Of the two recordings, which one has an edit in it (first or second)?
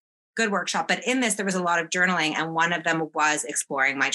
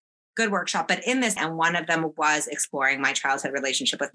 second